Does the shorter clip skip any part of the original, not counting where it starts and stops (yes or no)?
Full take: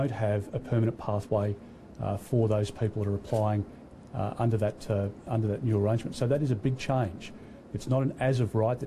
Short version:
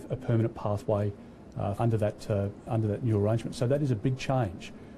yes